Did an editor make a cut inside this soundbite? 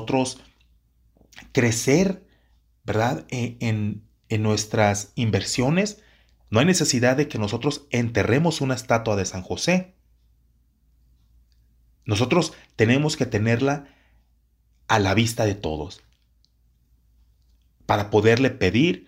yes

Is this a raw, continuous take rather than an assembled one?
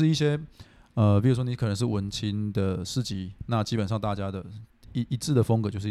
no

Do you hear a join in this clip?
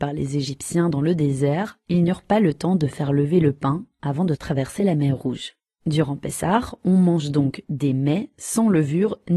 no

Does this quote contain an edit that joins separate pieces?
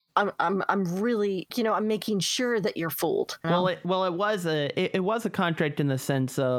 yes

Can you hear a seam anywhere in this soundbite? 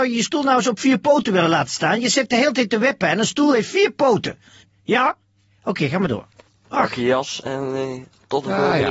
yes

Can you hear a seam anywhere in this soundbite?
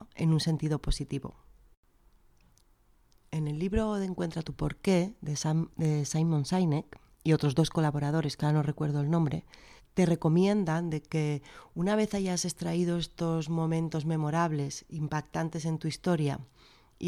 yes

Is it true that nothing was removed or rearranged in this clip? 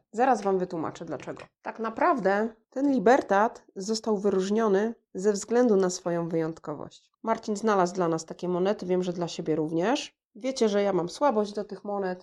no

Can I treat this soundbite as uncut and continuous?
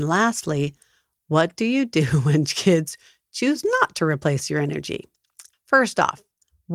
no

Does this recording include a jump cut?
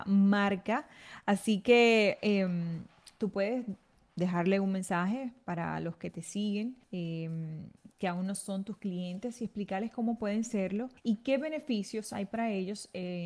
yes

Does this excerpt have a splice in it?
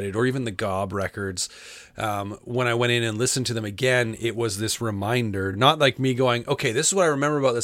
no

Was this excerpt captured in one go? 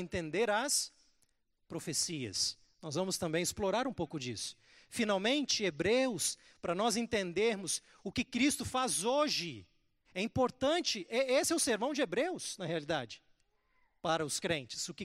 no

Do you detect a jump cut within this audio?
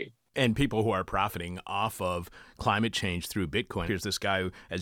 yes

